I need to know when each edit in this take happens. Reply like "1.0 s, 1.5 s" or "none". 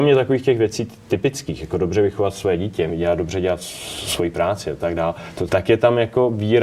2.9 s, 5.5 s